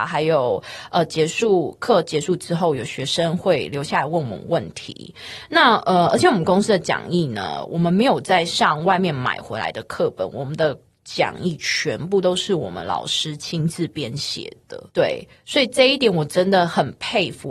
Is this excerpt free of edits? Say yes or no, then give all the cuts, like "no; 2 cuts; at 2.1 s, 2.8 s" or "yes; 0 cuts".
no; 1 cut; at 14.9 s